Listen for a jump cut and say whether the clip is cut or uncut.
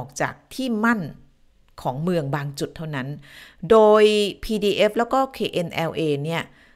uncut